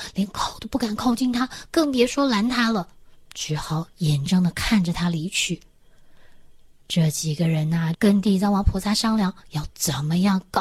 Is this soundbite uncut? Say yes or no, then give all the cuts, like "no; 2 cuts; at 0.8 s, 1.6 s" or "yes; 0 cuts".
no; 2 cuts; at 4.3 s, 7.9 s